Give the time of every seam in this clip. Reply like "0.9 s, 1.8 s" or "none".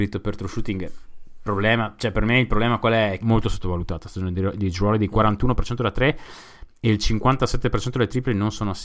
3.2 s